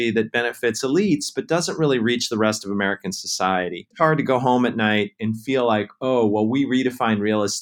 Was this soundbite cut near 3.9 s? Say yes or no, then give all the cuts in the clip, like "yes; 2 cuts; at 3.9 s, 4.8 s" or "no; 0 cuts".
no; 0 cuts